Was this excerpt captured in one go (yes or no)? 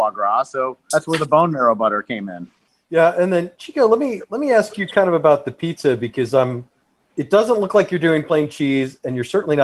no